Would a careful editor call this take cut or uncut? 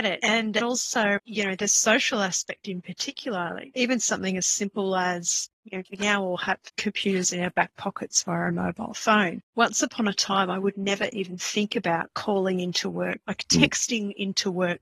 uncut